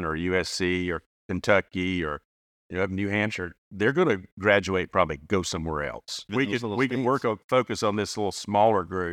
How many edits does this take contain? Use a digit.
1